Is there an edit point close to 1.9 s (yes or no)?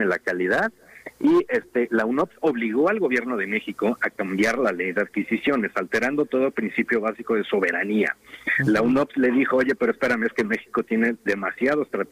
yes